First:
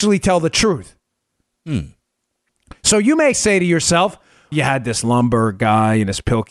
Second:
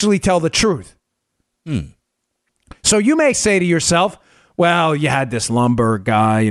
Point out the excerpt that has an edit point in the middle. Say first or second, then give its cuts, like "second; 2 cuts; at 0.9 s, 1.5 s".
first; 1 cut; at 4.5 s